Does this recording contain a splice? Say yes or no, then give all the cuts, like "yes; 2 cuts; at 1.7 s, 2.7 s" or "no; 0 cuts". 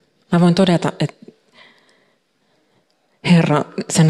yes; 1 cut; at 1.0 s